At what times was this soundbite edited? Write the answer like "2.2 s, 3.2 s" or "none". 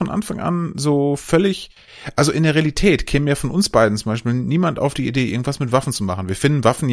none